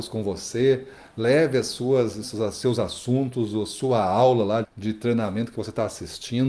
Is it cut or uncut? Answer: cut